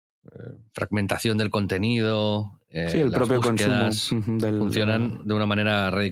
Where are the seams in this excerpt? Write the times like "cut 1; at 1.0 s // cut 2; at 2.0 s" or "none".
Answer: none